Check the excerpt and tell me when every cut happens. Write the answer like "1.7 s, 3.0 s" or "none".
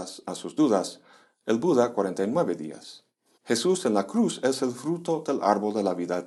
3.3 s